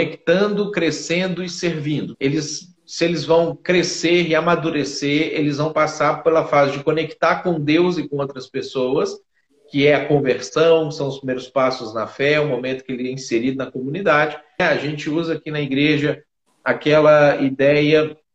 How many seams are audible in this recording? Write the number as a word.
two